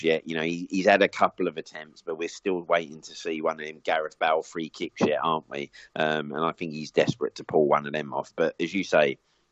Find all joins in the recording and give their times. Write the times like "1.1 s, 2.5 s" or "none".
none